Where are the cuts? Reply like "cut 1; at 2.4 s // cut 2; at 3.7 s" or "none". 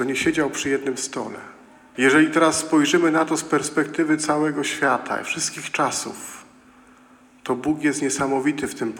cut 1; at 1.9 s